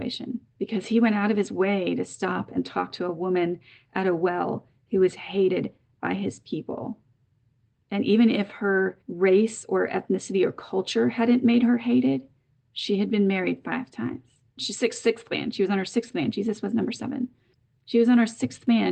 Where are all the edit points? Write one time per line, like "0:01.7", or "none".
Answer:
0:14.6